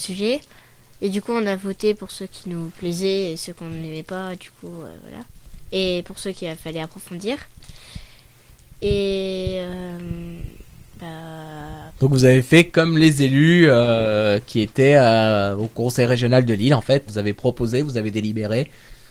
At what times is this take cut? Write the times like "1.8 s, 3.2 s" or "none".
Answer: 11.9 s, 17.1 s